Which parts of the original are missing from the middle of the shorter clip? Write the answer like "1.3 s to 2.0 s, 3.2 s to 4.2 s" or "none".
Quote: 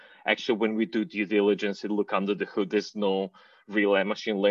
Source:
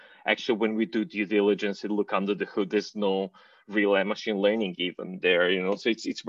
none